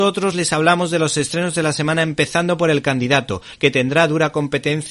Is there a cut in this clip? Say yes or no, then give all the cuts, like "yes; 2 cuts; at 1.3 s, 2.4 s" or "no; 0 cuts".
yes; 1 cut; at 3.6 s